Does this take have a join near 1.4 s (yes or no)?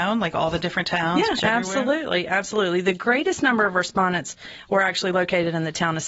yes